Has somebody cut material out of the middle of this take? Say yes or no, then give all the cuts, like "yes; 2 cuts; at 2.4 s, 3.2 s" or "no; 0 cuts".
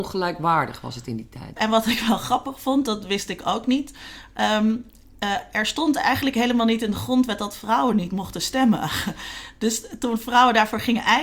yes; 1 cut; at 1.6 s